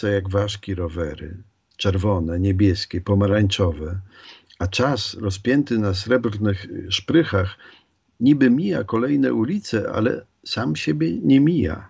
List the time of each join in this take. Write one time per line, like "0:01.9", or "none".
none